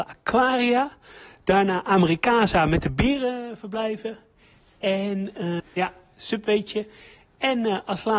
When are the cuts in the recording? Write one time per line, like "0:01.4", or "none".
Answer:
0:05.6